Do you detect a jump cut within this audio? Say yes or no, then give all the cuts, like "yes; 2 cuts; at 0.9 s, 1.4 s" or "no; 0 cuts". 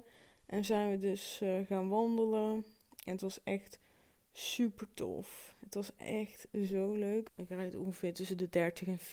yes; 1 cut; at 7.3 s